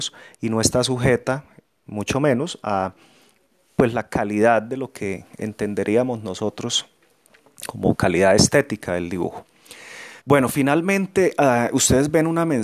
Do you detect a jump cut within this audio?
yes; 1 cut; at 10.2 s

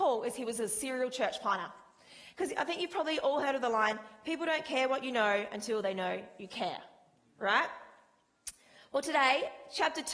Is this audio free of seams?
no; 1 cut; at 2.3 s

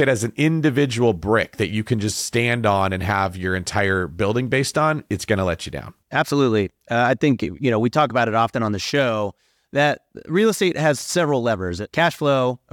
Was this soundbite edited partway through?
no; 0 cuts

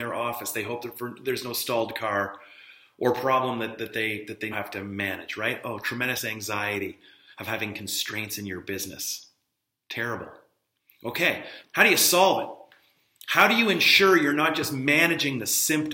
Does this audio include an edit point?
yes; 2 cuts; at 4.5 s, 11.6 s

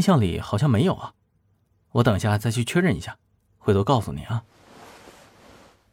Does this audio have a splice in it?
no; 0 cuts

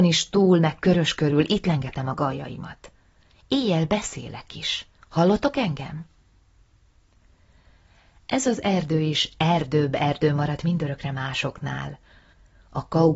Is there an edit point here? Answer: no; 0 cuts

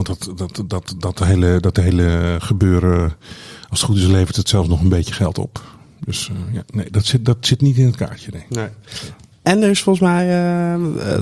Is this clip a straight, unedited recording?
yes; 0 cuts

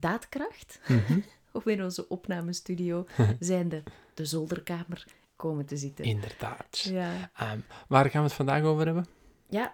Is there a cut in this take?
no; 0 cuts

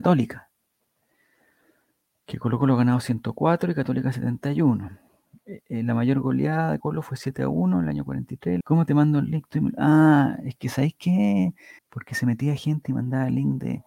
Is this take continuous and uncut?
no; 3 cuts; at 6.8 s, 8.6 s, 11.8 s

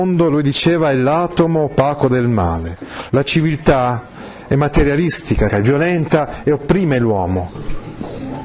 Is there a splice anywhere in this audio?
yes; 2 cuts; at 3.1 s, 5.5 s

